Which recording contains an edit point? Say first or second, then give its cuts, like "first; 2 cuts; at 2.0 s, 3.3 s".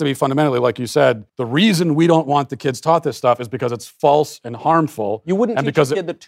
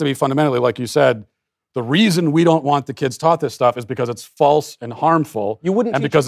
first; 1 cut; at 1.3 s